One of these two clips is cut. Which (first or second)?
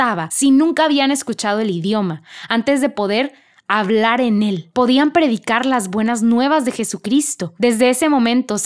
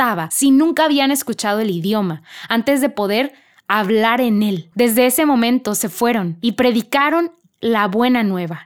second